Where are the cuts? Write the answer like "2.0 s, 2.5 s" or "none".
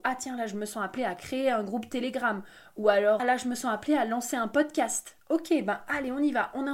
3.2 s